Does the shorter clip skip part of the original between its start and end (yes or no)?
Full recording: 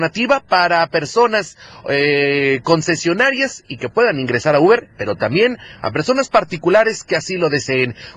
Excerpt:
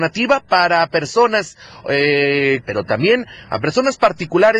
yes